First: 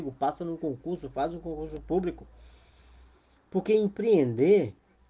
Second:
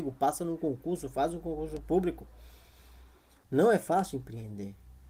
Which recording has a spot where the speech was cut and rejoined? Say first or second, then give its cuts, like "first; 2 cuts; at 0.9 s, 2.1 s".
second; 1 cut; at 3.4 s